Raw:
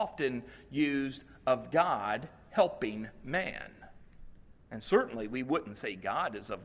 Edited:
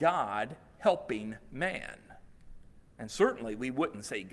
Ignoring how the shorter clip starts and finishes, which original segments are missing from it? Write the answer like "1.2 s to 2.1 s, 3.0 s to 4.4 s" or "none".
none